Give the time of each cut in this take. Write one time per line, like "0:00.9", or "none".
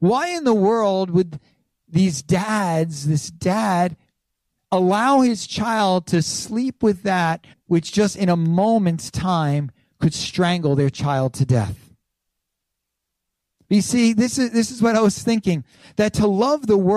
0:07.5